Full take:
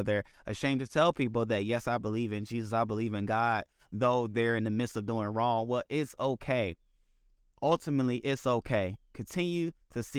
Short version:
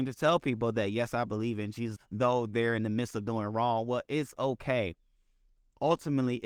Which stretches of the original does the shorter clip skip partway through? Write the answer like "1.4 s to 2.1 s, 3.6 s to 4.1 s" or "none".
2.7 s to 3.8 s